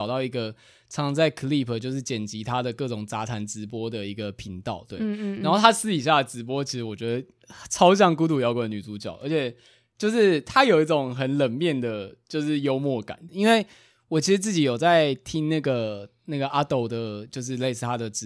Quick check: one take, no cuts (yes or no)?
no